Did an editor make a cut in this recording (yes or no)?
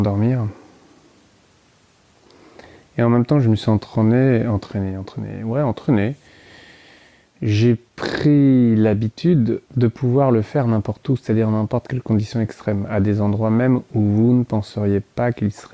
yes